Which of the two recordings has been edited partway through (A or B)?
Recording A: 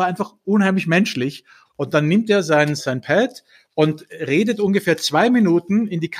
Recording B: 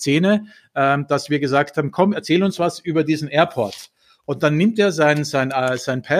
A